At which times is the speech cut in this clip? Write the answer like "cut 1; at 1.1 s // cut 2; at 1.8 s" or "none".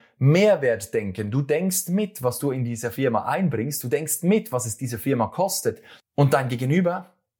cut 1; at 6.0 s